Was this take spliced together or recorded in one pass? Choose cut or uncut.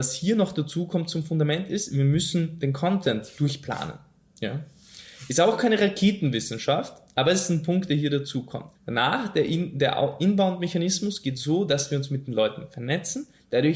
cut